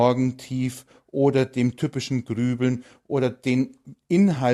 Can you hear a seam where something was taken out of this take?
no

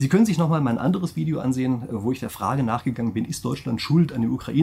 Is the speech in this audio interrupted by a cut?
no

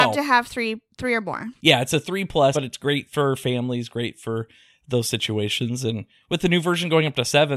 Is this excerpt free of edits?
no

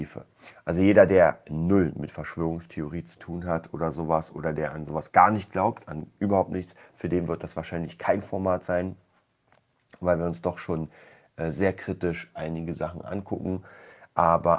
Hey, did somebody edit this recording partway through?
no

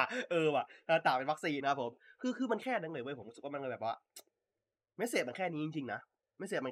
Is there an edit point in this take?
yes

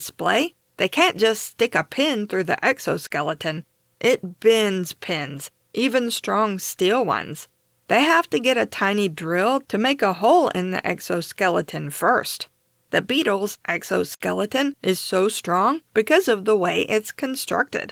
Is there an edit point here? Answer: no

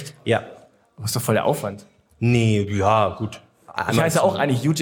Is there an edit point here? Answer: no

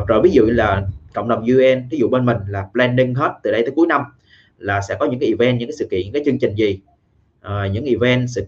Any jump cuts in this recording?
no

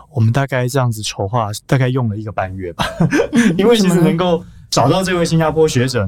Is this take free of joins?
no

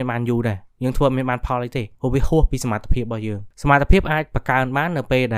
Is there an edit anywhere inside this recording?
yes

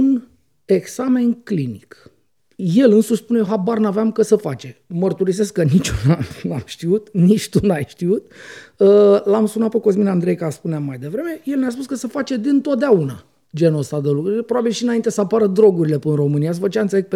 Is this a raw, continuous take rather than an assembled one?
yes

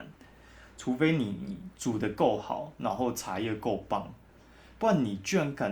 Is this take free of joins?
yes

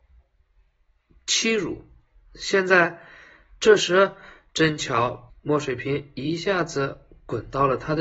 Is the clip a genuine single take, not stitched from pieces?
no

